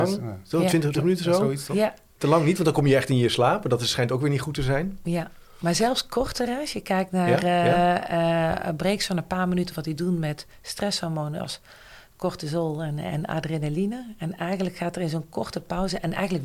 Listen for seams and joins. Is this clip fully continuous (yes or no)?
no